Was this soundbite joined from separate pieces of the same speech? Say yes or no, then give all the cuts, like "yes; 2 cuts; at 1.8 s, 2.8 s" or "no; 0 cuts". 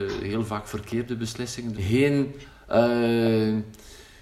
yes; 1 cut; at 1.7 s